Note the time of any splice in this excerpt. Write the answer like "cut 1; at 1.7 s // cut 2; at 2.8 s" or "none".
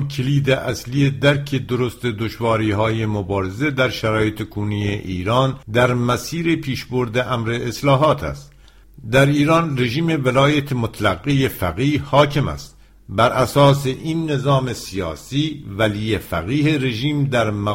cut 1; at 5.6 s